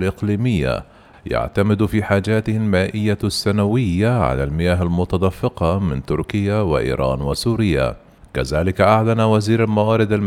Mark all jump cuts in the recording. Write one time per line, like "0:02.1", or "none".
0:01.1
0:08.2